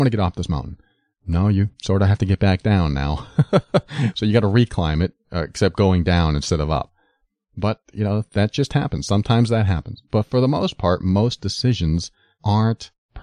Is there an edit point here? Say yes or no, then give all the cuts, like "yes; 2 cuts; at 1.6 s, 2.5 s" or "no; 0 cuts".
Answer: no; 0 cuts